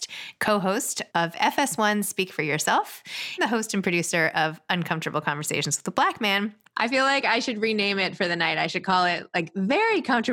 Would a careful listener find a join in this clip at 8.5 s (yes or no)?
no